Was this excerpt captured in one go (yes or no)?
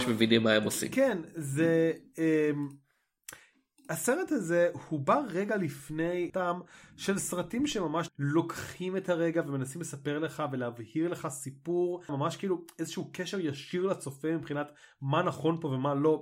no